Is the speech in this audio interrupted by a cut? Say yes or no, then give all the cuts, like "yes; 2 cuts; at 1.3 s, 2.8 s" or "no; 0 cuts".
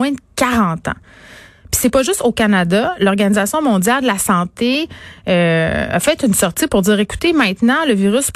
no; 0 cuts